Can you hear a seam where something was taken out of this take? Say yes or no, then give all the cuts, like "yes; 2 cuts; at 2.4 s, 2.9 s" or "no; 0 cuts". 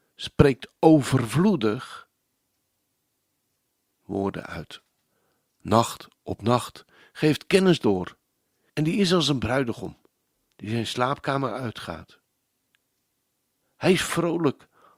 yes; 1 cut; at 8.7 s